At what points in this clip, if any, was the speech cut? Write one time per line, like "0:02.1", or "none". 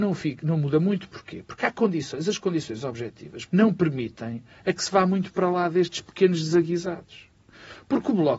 0:03.5